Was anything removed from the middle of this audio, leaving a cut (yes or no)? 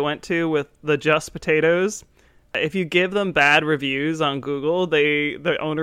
no